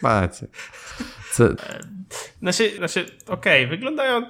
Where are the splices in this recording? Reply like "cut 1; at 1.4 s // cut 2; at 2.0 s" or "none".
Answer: cut 1; at 1.6 s // cut 2; at 2.8 s